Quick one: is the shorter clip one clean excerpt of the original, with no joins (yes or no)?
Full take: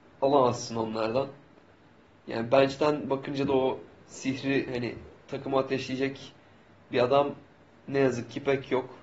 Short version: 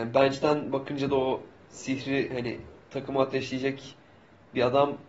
yes